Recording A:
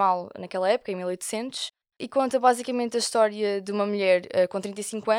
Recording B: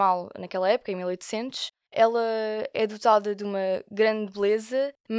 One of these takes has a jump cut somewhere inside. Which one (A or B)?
B